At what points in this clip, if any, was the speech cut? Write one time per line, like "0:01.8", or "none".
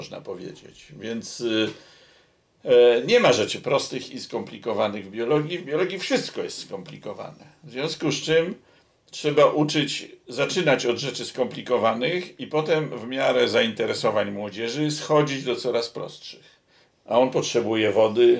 0:16.9